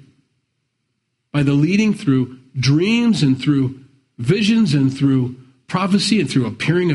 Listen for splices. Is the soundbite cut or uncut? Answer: uncut